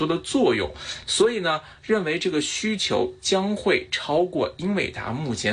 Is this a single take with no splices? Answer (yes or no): no